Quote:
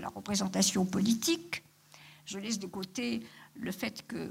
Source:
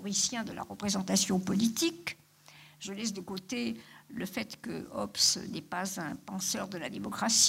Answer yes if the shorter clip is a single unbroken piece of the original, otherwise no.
yes